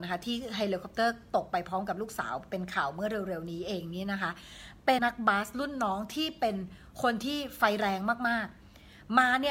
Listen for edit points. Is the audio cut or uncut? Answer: cut